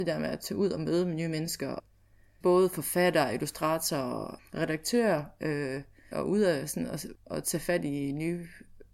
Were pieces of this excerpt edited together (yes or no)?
yes